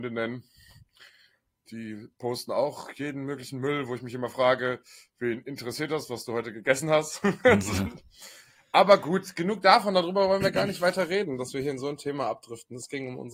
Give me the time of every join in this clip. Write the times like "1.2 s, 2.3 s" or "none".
none